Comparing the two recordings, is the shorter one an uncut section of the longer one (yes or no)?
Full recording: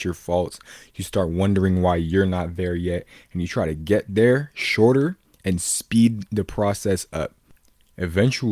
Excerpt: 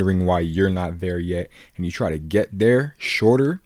yes